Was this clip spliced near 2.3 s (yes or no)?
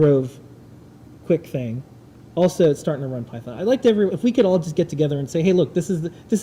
no